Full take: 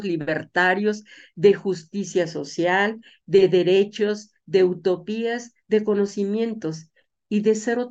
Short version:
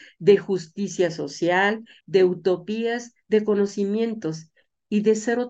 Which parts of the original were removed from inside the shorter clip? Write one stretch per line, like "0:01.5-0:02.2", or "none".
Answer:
0:03.2-0:04.4